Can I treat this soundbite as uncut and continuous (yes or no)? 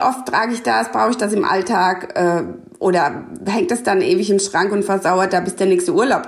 yes